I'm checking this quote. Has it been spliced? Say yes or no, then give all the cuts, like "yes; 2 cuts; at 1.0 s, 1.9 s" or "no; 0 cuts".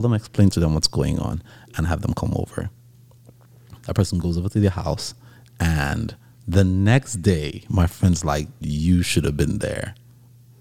yes; 2 cuts; at 3.8 s, 8.6 s